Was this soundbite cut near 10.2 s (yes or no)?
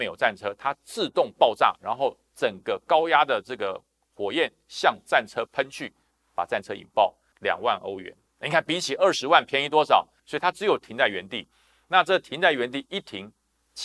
yes